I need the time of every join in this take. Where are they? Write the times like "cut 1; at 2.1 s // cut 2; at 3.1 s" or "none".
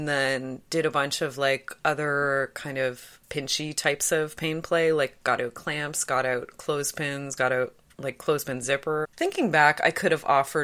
cut 1; at 9.0 s